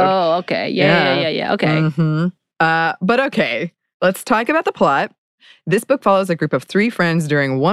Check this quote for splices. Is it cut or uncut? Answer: cut